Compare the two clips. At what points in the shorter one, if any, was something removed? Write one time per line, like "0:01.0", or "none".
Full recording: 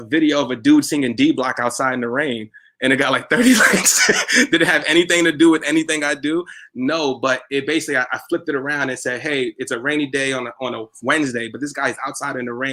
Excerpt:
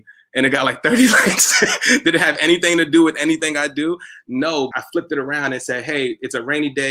0:04.7